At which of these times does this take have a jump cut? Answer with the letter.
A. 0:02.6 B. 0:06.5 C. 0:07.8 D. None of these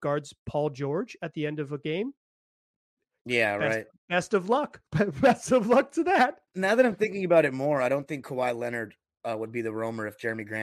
B